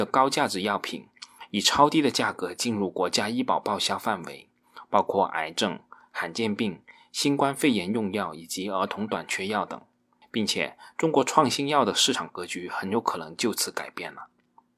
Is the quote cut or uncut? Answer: uncut